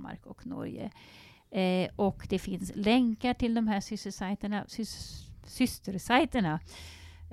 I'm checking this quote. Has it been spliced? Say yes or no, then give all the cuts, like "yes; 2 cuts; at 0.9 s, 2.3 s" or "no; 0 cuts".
no; 0 cuts